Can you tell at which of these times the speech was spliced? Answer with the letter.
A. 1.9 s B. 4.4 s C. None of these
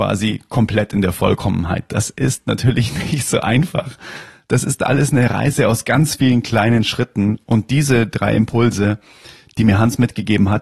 C